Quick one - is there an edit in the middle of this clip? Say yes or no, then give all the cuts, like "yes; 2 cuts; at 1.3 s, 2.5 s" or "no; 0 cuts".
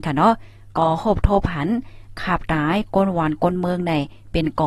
yes; 1 cut; at 2.5 s